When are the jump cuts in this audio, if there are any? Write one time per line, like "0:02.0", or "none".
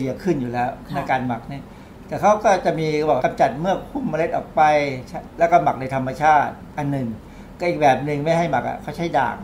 0:03.2